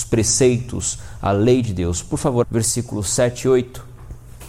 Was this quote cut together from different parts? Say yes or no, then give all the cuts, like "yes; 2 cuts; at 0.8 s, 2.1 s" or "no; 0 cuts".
yes; 1 cut; at 2.4 s